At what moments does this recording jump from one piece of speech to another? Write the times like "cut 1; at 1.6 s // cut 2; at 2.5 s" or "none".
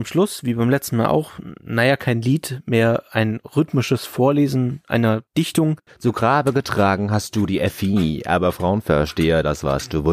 cut 1; at 5.9 s